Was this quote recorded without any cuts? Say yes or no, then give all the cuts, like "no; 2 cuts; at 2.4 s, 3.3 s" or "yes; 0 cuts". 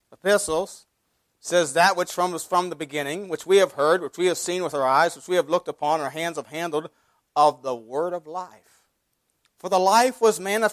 yes; 0 cuts